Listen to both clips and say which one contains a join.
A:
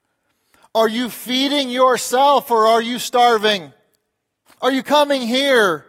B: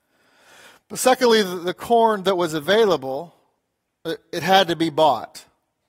A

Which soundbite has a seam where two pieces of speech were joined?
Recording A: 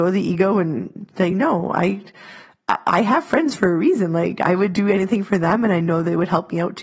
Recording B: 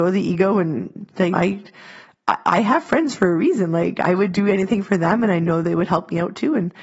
B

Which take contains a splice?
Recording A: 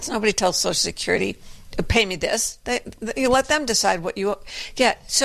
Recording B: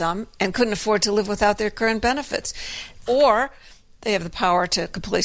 B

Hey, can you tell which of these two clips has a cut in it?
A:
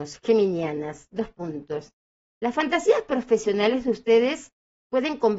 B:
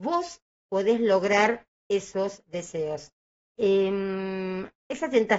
B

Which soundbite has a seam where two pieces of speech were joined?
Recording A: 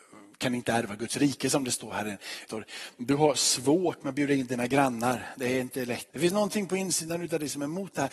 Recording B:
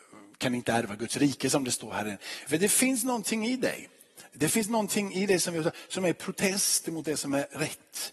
A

